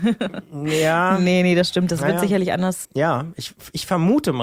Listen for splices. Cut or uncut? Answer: cut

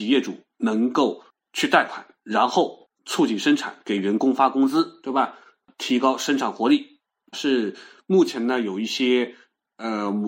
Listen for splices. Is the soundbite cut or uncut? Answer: cut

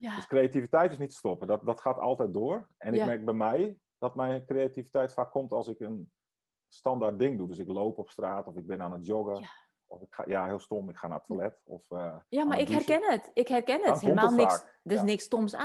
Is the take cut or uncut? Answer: uncut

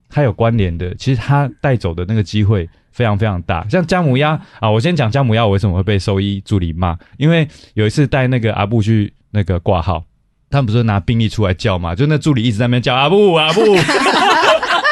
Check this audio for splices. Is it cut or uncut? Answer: uncut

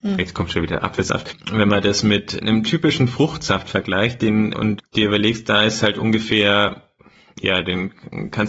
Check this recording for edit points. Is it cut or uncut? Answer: cut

